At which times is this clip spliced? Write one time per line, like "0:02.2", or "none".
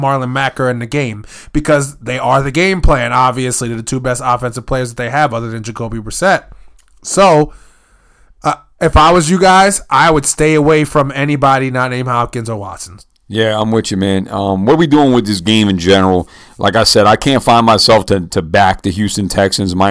0:18.3

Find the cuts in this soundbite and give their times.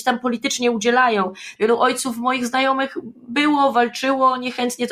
0:01.6

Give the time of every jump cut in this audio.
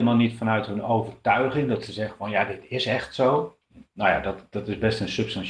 0:03.8

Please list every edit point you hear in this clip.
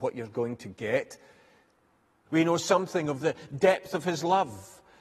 0:02.3

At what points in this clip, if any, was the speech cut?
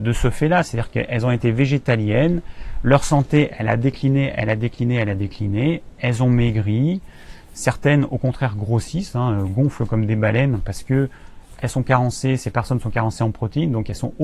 none

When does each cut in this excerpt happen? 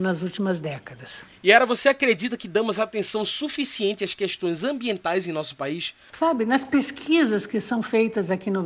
0:06.1

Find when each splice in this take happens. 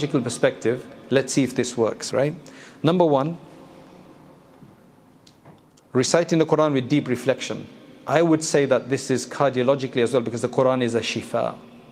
none

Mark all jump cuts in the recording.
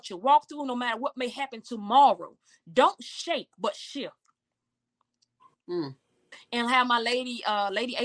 none

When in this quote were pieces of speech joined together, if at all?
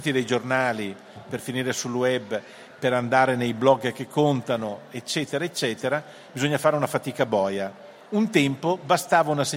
0:01.2

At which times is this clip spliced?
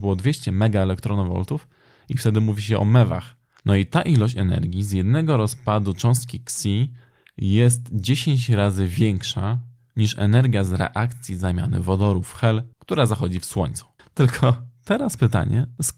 0:03.6
0:12.7
0:14.0

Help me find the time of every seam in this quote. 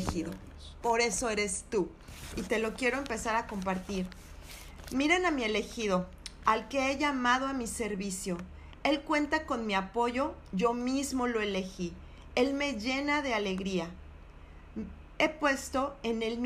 none

